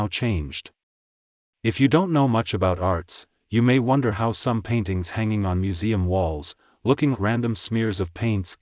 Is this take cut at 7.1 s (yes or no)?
yes